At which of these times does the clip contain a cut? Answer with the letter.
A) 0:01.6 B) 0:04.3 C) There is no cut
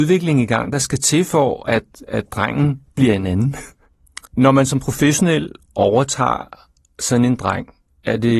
B